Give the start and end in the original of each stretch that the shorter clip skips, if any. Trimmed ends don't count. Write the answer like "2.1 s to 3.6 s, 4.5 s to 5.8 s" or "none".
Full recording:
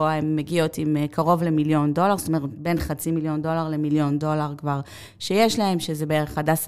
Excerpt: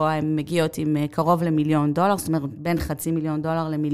none